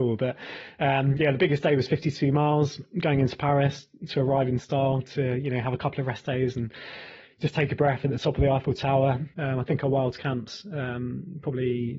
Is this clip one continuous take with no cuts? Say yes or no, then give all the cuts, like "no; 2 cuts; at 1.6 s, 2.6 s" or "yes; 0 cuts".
no; 1 cut; at 9.3 s